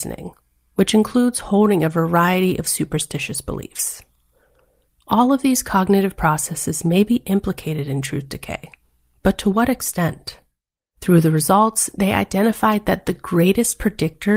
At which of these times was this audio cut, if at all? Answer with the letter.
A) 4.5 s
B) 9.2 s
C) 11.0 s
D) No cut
C